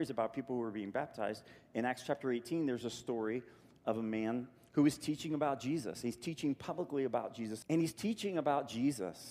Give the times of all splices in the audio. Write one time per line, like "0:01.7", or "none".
0:07.6